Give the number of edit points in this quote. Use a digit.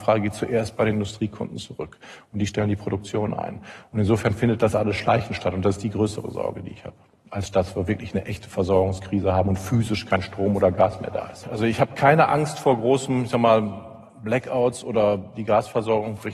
1